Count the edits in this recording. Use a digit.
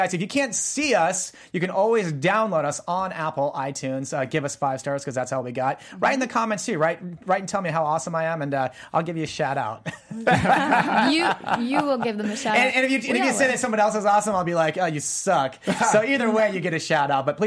0